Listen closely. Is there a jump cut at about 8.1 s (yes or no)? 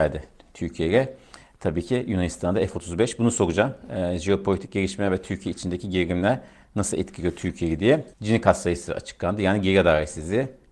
yes